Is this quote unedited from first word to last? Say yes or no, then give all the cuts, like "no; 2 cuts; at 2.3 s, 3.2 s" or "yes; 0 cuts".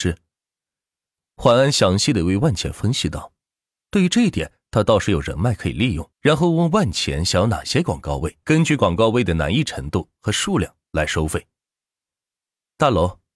no; 2 cuts; at 6.1 s, 8.4 s